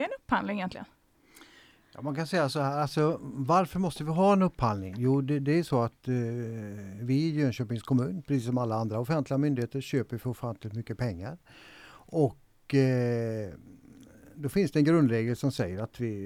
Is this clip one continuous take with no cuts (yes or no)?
yes